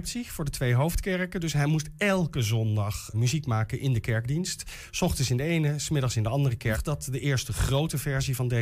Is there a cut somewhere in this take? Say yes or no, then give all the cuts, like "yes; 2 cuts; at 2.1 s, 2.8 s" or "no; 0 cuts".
yes; 2 cuts; at 3.1 s, 6.7 s